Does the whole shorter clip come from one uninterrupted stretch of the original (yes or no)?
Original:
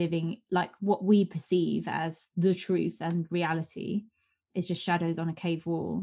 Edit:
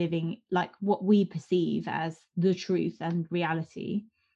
yes